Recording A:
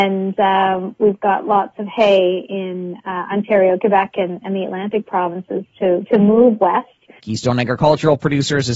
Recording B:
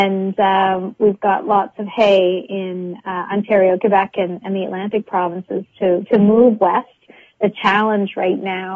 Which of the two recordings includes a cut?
A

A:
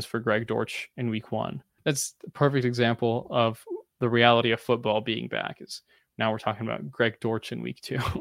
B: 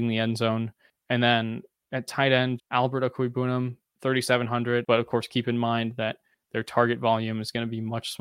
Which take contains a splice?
B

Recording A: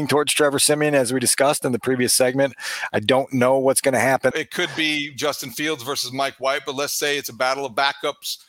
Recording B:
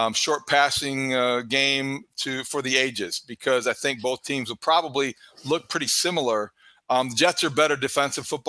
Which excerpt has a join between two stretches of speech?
A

